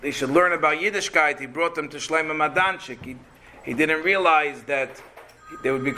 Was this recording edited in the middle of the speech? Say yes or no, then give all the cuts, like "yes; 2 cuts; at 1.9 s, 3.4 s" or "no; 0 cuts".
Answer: no; 0 cuts